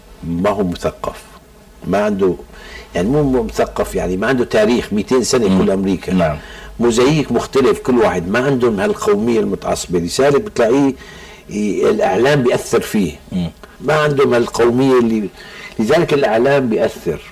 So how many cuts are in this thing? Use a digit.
1